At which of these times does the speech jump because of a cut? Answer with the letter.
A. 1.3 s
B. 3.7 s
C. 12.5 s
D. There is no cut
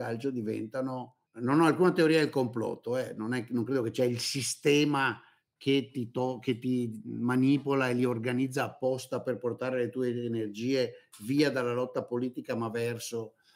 A